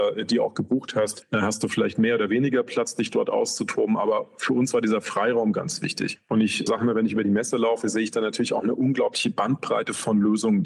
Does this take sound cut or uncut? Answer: uncut